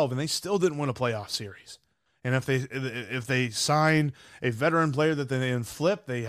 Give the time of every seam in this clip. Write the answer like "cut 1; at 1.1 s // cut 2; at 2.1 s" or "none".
cut 1; at 2.1 s